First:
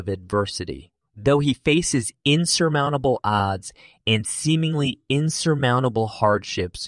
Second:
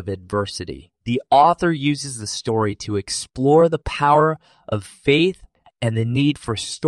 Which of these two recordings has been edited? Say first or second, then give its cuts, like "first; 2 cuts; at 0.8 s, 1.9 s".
second; 2 cuts; at 1.0 s, 5.6 s